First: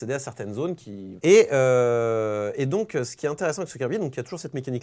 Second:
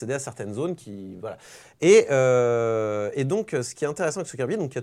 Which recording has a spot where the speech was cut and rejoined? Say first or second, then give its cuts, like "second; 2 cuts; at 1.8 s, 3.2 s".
first; 1 cut; at 1.2 s